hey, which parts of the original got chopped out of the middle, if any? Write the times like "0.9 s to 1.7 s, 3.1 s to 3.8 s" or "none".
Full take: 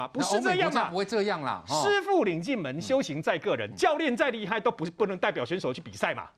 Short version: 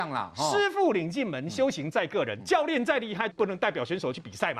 4.6 s to 4.9 s